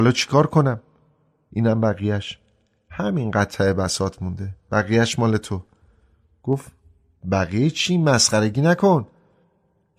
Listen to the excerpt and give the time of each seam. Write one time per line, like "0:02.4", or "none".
0:01.5

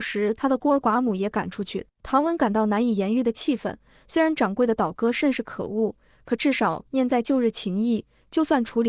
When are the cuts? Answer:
0:01.9

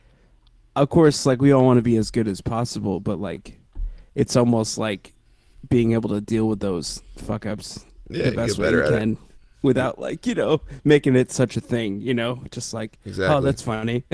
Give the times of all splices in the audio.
none

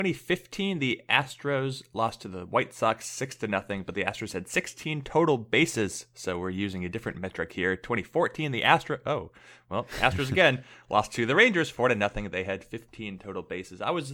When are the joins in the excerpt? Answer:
none

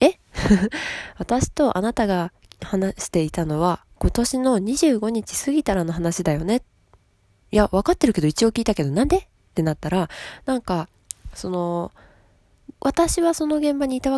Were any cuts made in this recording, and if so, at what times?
0:07.4
0:12.8

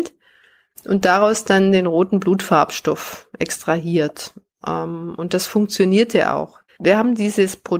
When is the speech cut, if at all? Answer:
0:06.7

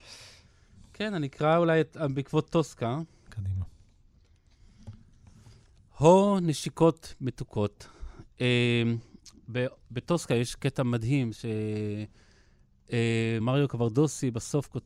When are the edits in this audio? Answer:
0:13.4

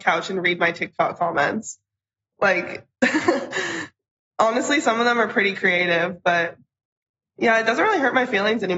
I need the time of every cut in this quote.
none

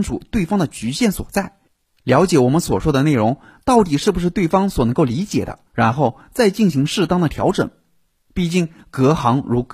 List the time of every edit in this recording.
0:05.7

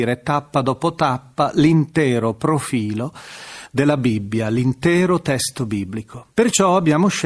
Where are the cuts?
0:06.3

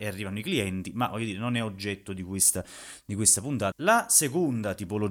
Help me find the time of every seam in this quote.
0:03.7

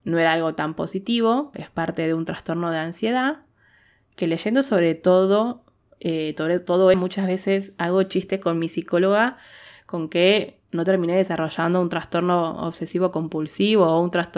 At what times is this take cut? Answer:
0:01.5
0:06.9
0:10.6

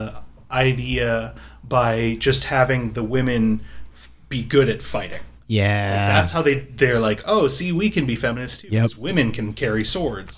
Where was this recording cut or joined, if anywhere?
none

